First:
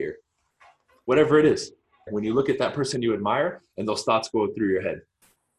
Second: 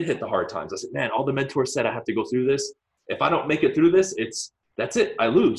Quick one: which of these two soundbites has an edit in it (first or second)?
first